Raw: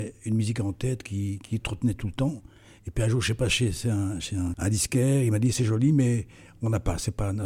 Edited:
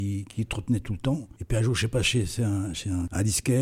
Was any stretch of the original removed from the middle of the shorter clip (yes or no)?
yes